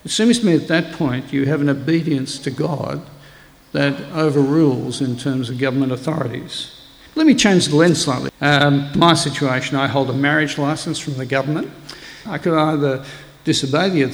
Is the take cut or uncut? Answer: cut